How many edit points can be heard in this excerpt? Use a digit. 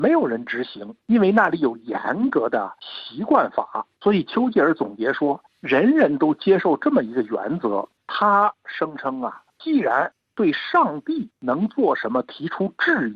1